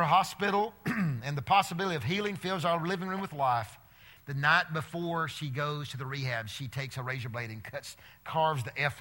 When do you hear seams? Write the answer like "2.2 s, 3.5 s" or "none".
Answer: 4.2 s